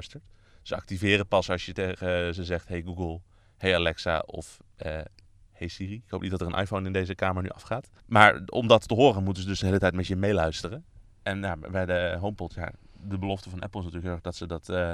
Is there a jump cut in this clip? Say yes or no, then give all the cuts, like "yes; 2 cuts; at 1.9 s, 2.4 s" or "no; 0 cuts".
yes; 1 cut; at 8.0 s